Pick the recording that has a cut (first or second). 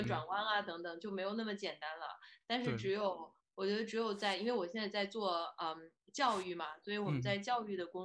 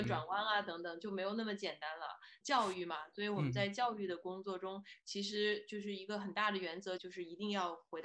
second